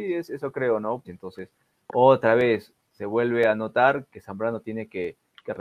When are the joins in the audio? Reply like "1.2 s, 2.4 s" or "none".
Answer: 1.0 s, 4.1 s